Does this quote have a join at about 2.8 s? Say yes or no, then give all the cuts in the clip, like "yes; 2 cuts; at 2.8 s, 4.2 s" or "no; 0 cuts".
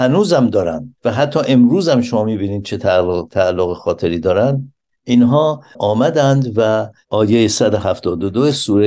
no; 1 cut; at 1.0 s